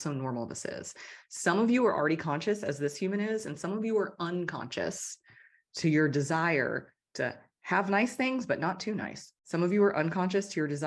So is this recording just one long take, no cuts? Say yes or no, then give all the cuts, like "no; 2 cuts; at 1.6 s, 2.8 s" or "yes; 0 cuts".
no; 1 cut; at 9.4 s